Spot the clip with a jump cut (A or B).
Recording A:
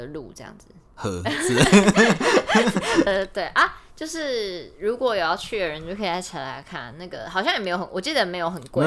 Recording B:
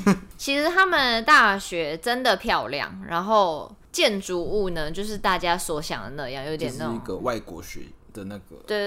A